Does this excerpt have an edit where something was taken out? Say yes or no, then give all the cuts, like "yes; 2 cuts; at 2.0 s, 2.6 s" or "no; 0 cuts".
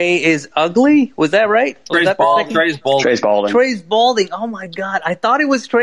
no; 0 cuts